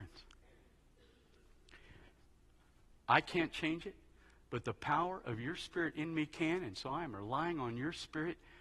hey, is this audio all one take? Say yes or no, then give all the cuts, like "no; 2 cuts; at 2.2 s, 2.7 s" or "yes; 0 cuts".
no; 1 cut; at 3.0 s